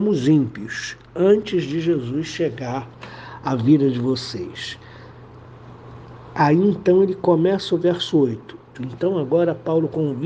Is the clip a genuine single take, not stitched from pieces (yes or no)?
no